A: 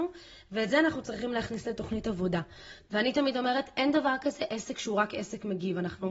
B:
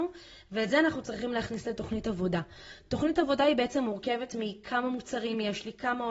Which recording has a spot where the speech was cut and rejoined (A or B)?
A